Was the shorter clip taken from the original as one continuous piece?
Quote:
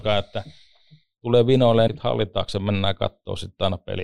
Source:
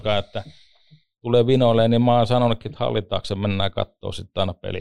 no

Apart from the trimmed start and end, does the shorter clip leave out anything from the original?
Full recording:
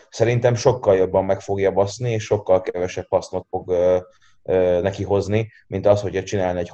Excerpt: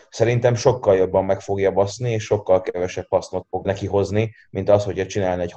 yes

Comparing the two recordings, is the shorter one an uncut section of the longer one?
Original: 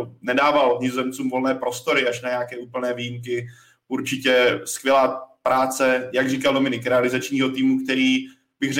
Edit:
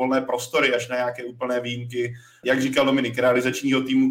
no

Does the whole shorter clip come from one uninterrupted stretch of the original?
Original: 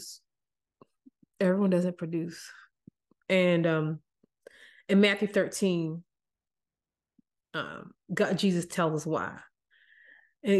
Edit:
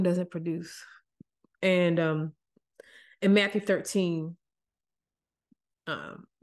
yes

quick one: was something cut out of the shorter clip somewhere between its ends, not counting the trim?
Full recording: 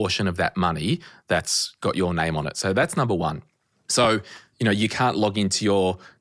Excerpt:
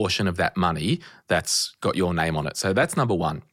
no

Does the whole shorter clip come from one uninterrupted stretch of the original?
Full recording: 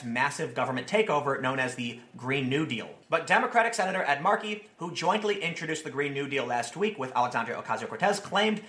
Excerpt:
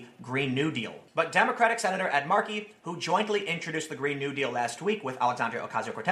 yes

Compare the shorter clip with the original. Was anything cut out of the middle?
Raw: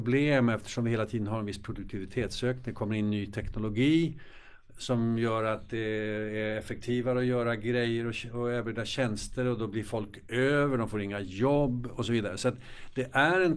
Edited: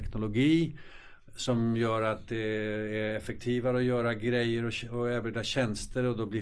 no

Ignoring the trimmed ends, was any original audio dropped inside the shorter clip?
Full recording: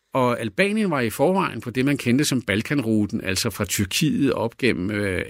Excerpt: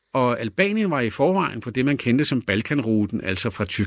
no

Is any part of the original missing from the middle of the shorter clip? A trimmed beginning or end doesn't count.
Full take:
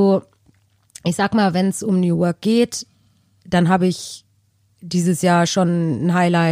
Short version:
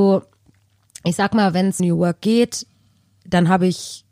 yes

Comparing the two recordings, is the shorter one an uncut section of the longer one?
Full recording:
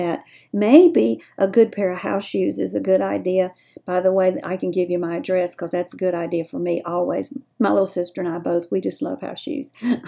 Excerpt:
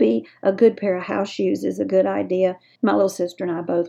no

